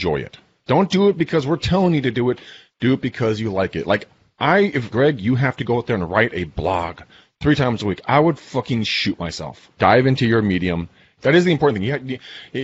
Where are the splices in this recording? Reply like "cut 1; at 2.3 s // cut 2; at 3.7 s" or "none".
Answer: cut 1; at 4.9 s // cut 2; at 9.8 s // cut 3; at 11.2 s